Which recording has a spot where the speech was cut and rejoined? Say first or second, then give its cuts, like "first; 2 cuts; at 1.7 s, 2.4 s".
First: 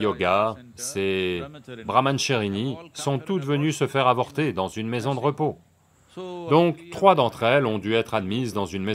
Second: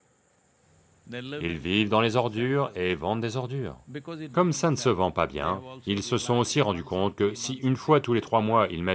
first; 1 cut; at 5.9 s